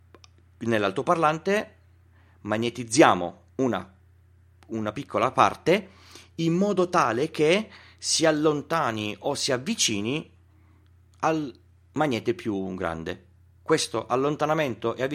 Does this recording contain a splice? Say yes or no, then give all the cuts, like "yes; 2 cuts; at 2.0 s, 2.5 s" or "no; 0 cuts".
no; 0 cuts